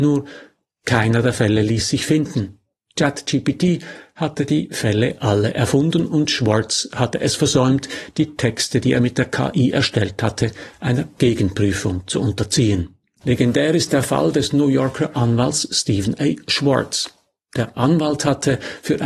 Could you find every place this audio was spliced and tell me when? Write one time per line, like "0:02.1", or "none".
0:13.2